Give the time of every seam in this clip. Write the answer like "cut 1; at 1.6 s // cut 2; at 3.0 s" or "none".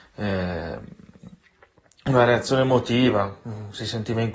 none